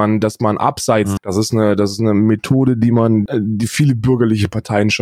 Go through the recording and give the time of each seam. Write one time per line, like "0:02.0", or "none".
0:01.2
0:03.3